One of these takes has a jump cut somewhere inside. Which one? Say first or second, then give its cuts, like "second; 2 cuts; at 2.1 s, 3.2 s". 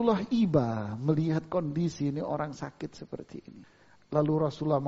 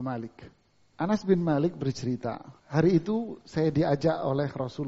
second; 2 cuts; at 0.9 s, 2.6 s